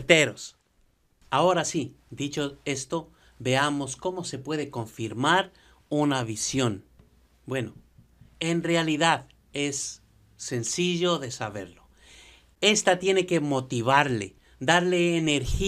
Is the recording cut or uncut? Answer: uncut